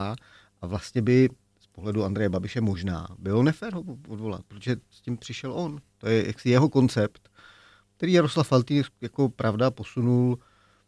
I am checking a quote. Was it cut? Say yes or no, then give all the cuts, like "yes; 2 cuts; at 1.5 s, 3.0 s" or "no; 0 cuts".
no; 0 cuts